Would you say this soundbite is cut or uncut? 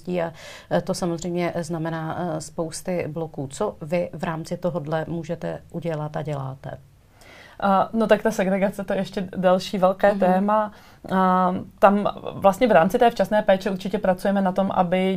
uncut